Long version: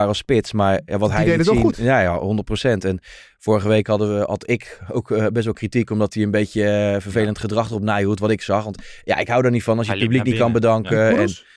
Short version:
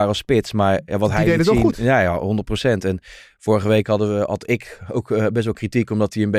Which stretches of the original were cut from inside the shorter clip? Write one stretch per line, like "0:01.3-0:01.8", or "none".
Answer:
none